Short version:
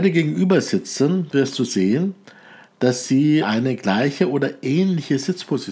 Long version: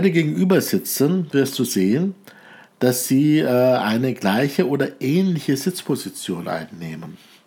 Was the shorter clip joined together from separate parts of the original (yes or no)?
yes